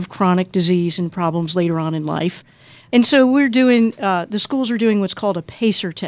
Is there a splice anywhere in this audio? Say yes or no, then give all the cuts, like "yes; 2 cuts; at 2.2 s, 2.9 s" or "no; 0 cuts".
no; 0 cuts